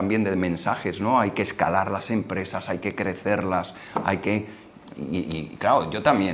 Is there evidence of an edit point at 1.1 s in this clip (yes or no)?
no